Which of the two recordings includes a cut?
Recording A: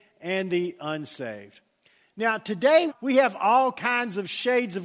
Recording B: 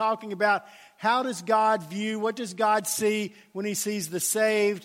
A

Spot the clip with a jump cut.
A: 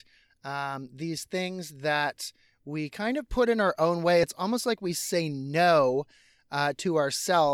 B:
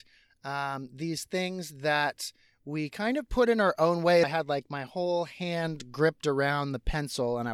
B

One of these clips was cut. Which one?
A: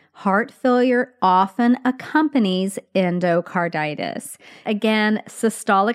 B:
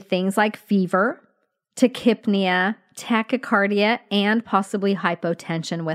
A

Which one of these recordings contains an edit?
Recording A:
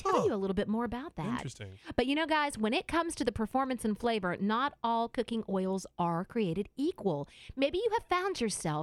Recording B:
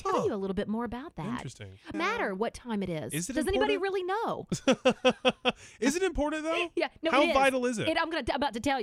B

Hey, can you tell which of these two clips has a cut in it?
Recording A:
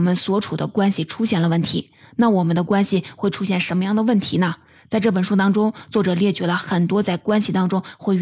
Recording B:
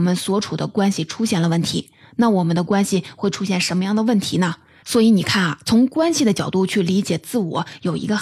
B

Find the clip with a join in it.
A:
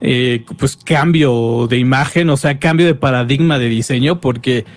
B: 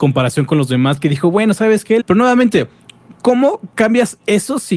B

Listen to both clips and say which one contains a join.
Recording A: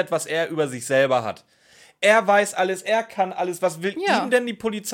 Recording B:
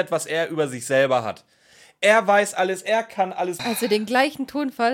B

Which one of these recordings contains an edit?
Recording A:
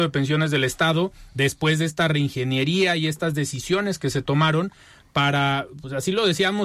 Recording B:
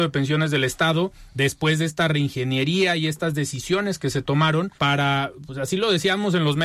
B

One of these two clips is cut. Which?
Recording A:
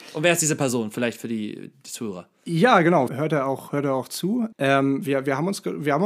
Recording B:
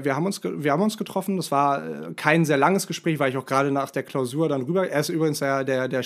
A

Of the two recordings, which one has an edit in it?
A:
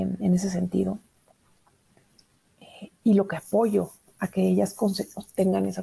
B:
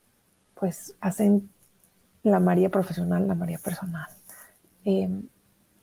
B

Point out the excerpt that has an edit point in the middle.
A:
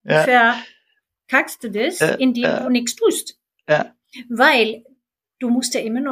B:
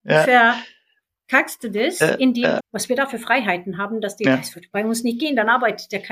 B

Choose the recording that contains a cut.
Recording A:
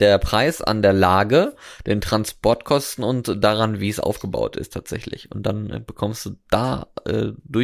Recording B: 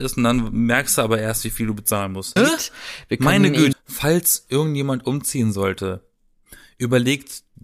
B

